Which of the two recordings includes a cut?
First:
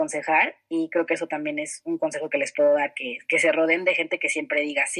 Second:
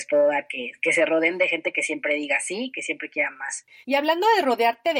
second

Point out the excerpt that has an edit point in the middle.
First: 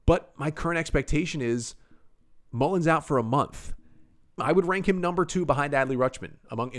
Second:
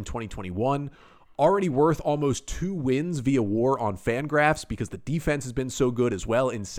first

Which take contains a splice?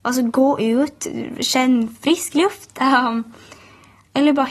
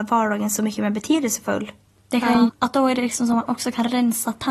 second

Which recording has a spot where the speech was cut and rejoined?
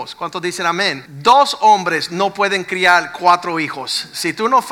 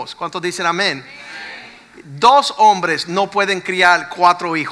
first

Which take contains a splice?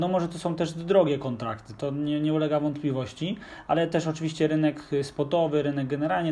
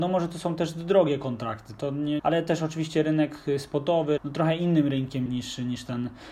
second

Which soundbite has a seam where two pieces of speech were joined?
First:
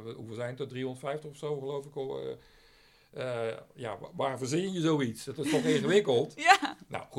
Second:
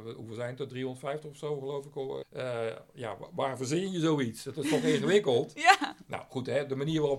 second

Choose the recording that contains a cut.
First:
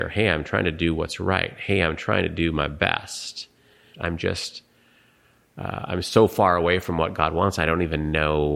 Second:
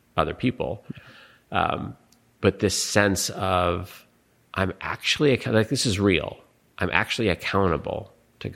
first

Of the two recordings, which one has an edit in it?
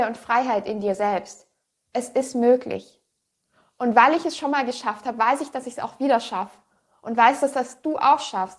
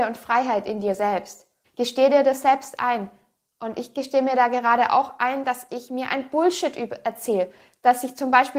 second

